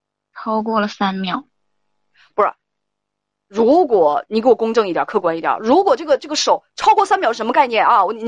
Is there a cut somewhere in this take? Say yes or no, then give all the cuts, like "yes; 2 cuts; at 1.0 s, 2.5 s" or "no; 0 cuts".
no; 0 cuts